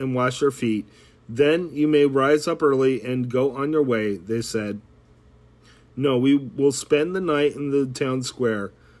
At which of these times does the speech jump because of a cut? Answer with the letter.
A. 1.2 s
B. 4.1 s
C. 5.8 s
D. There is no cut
D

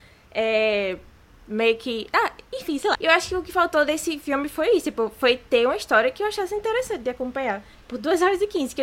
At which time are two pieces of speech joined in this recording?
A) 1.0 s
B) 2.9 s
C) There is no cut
B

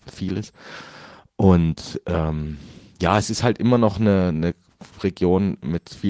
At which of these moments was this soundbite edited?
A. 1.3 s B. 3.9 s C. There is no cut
C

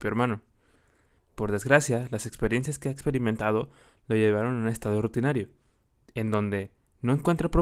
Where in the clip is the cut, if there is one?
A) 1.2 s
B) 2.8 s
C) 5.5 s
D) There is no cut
A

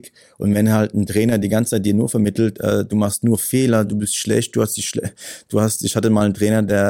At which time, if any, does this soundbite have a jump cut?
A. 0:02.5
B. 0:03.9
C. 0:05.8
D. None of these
D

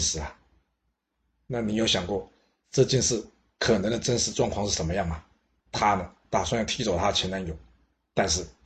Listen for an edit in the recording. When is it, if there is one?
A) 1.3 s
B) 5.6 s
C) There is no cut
B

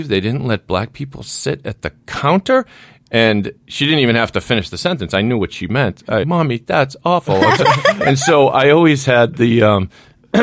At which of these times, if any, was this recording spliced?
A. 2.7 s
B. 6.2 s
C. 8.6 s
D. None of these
B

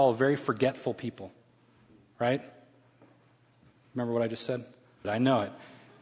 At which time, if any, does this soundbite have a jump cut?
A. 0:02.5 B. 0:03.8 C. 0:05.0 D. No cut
C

